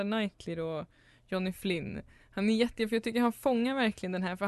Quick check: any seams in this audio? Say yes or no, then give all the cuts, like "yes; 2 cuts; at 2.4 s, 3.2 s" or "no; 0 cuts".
no; 0 cuts